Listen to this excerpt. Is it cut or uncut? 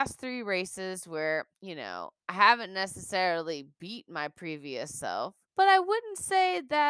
cut